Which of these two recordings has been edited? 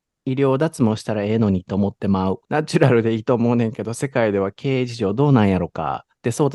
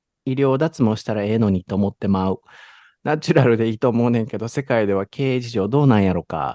first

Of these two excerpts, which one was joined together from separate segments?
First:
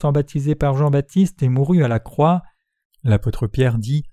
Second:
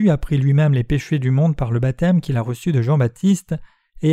first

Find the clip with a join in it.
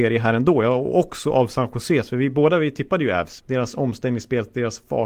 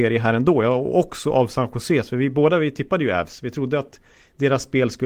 first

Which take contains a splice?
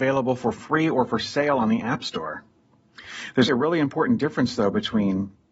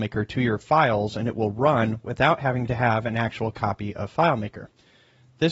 first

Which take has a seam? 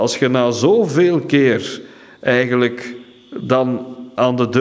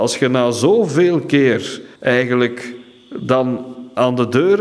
second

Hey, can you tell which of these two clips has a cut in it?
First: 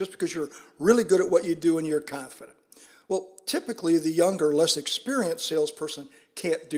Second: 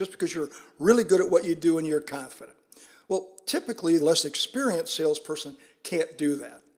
second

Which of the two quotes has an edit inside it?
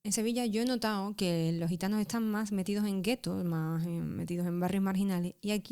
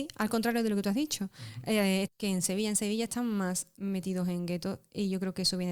second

